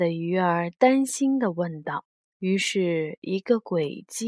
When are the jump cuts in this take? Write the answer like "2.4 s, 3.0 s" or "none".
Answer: 2.3 s